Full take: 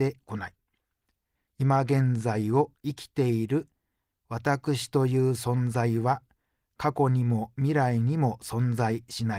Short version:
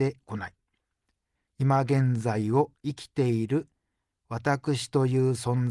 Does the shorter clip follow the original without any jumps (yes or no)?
yes